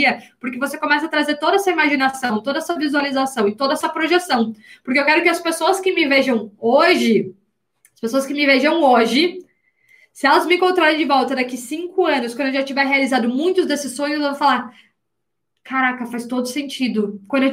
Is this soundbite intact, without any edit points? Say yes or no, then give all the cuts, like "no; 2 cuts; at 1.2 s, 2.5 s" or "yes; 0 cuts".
yes; 0 cuts